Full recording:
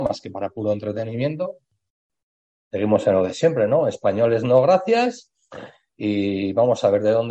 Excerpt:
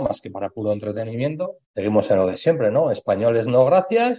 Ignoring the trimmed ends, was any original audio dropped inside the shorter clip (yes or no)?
yes